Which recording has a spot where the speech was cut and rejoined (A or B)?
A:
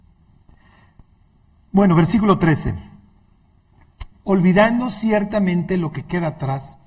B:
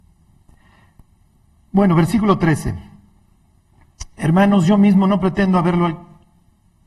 A